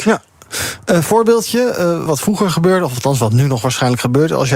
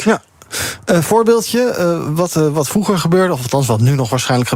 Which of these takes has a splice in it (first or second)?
first